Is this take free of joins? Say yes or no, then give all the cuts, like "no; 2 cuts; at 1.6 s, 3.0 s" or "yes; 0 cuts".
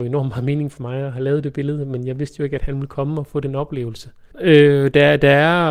no; 1 cut; at 4.3 s